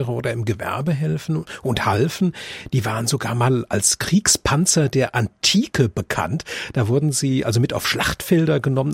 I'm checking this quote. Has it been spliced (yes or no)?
no